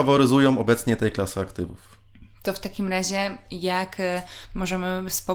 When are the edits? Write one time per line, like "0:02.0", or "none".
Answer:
none